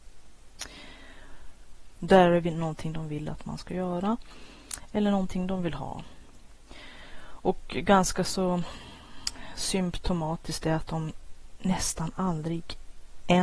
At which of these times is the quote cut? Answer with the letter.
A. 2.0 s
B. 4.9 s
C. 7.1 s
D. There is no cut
A